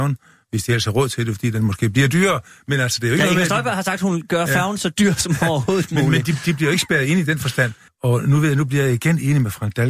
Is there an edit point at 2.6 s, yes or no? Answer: no